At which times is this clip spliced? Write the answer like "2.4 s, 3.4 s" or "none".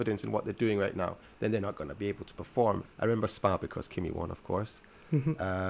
2.8 s